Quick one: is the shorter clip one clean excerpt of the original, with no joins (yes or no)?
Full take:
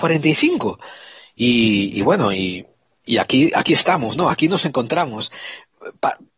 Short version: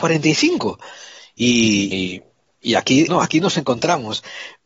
no